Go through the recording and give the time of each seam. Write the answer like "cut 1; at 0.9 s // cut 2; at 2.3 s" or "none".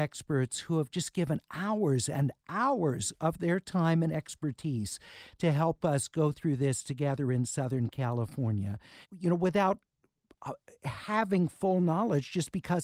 cut 1; at 9.0 s